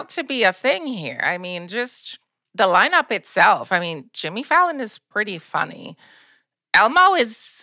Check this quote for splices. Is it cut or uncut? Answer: uncut